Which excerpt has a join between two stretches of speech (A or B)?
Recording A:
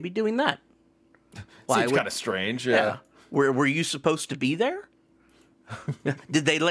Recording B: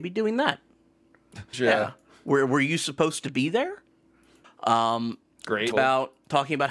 B